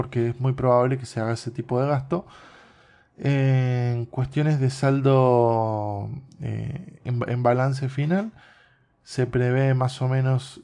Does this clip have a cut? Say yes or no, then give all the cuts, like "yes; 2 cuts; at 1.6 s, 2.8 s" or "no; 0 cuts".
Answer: no; 0 cuts